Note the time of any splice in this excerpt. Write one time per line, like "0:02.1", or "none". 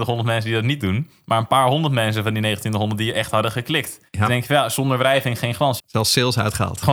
0:04.1
0:05.8